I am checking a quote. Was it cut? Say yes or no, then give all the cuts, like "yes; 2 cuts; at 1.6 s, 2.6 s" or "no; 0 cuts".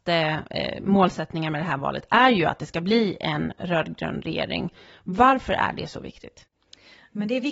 no; 0 cuts